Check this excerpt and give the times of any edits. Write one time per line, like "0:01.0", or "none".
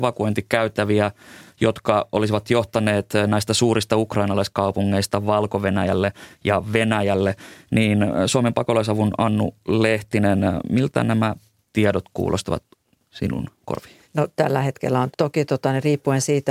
0:14.0
0:15.1